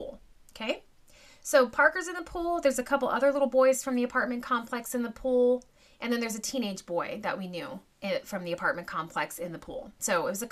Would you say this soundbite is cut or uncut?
uncut